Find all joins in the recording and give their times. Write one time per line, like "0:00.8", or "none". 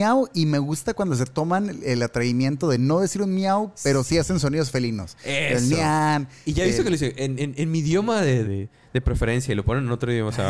0:08.4